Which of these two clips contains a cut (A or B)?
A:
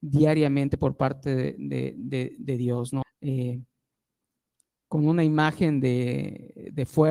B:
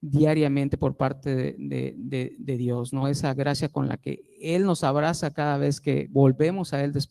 A